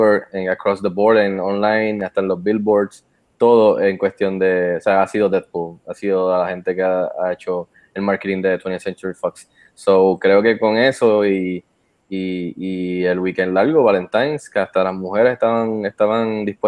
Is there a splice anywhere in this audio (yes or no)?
no